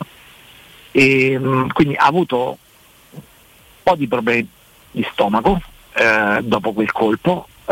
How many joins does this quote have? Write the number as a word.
zero